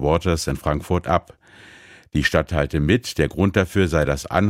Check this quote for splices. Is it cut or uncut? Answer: uncut